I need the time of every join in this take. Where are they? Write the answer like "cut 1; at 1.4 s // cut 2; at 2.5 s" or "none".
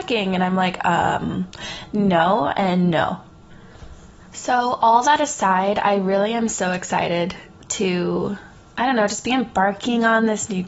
none